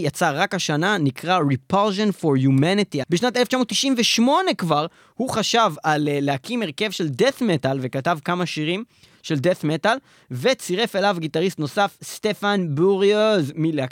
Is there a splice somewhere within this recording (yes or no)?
yes